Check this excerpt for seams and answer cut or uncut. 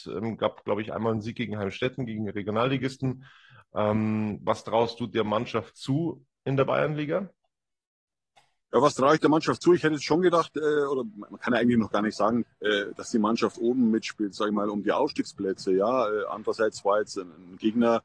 cut